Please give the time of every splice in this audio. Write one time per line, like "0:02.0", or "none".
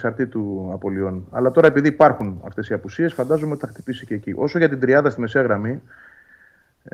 none